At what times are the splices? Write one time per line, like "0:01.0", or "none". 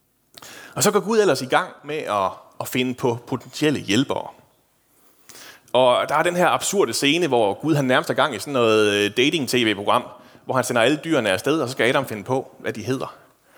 none